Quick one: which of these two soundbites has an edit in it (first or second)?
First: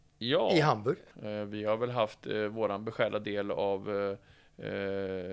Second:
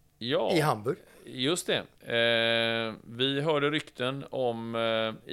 first